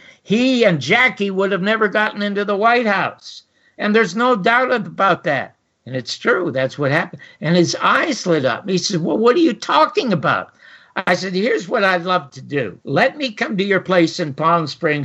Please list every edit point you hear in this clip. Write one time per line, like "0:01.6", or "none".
0:12.8

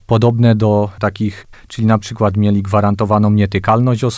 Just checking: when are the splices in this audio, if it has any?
0:01.5

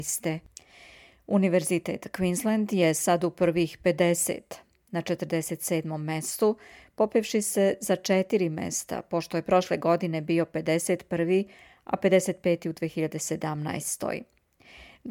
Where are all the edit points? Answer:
none

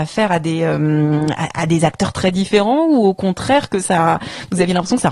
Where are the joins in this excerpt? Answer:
none

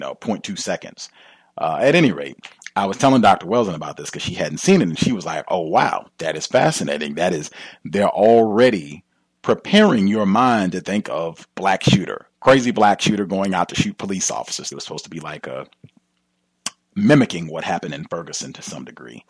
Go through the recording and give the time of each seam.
0:14.7

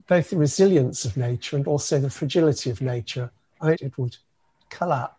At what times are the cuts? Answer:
0:03.7

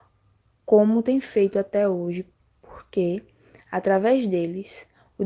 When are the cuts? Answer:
none

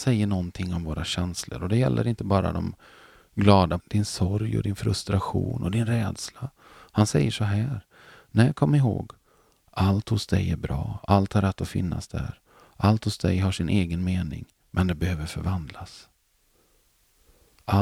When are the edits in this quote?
0:03.8

